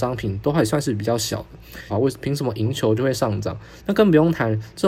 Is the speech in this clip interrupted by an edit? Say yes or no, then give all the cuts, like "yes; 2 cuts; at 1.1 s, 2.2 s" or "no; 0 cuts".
yes; 2 cuts; at 1.9 s, 3.8 s